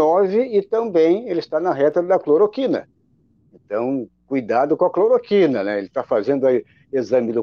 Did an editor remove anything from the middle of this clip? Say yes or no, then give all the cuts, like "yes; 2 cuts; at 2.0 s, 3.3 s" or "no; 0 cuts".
no; 0 cuts